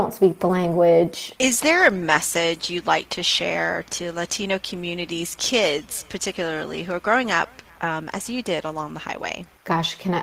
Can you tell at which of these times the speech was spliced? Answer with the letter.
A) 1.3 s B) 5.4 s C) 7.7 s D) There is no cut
A